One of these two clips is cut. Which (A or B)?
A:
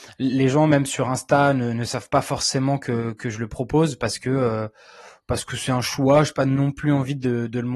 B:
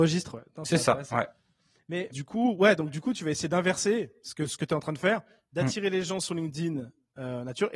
B